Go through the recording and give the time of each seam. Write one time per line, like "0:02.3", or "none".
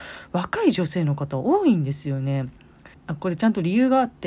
0:02.9